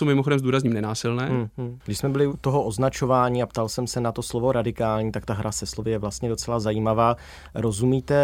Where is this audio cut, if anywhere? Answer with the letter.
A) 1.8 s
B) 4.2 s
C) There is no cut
A